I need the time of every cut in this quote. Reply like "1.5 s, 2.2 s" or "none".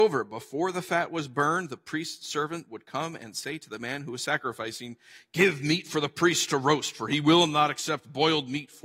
none